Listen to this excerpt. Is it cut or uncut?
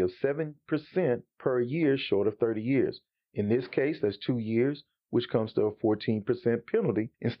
uncut